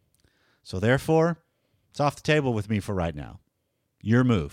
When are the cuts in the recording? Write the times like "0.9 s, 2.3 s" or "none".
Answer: none